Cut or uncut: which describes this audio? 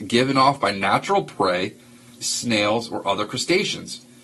cut